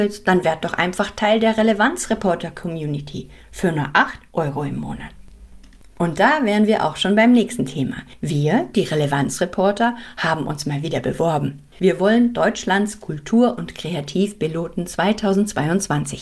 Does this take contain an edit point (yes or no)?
no